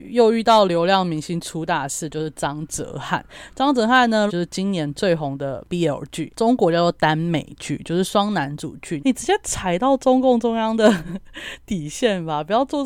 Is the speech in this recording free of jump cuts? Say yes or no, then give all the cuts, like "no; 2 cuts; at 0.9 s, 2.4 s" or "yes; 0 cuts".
no; 2 cuts; at 4.3 s, 9.0 s